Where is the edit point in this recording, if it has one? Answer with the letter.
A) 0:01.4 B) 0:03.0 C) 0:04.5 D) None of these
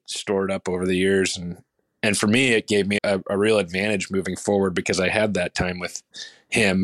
B